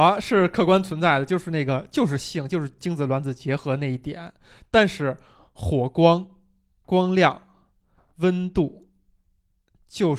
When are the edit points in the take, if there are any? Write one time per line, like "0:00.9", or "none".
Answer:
none